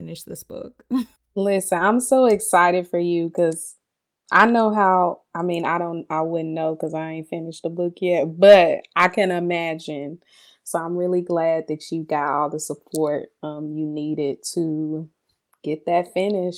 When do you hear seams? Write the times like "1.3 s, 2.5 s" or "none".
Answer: 1.2 s